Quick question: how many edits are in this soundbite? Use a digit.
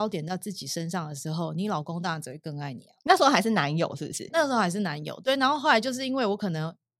0